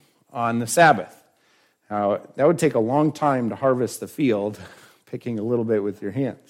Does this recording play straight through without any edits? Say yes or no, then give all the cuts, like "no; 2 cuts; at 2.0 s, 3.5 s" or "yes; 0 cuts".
yes; 0 cuts